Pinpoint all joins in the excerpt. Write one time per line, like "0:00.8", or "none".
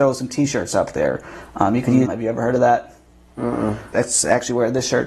0:02.0
0:03.9

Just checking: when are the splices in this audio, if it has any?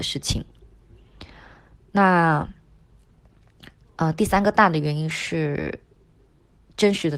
none

